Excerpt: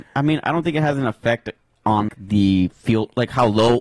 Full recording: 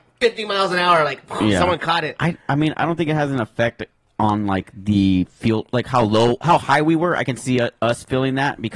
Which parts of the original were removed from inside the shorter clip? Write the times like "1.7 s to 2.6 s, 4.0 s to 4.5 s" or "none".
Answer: 4.4 s to 4.6 s